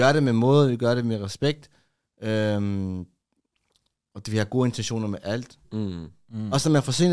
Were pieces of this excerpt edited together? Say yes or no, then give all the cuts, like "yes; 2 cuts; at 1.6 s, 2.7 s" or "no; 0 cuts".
yes; 1 cut; at 5.6 s